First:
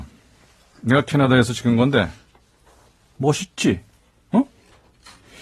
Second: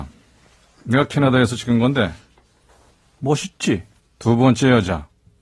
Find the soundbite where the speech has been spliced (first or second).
second